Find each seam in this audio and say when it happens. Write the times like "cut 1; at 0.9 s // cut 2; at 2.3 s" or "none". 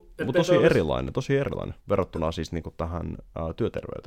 cut 1; at 1.8 s